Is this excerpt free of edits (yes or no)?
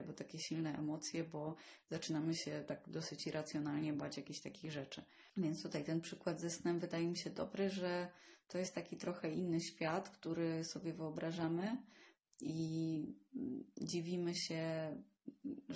no